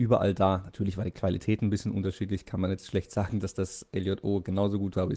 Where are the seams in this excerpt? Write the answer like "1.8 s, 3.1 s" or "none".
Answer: none